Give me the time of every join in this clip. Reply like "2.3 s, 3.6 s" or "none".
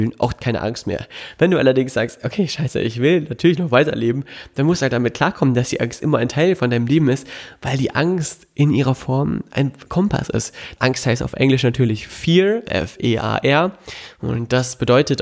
10.8 s, 12.7 s